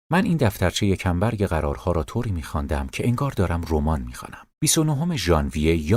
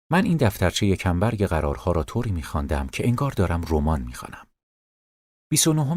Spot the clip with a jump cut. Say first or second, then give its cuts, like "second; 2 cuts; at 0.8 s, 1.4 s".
first; 1 cut; at 4.5 s